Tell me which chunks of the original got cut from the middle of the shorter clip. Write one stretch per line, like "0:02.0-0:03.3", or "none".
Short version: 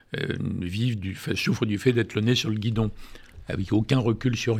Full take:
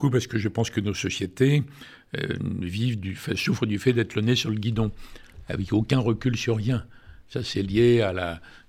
none